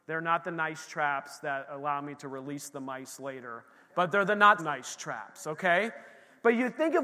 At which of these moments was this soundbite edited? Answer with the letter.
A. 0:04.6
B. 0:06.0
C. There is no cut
A